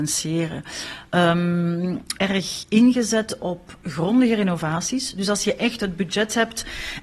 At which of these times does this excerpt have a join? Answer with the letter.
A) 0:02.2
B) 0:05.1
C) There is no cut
A